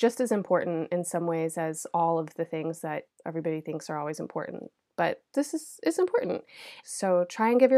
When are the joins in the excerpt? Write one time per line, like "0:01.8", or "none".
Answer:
0:03.1
0:06.8